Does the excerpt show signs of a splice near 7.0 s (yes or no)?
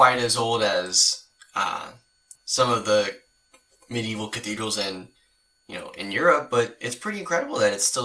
no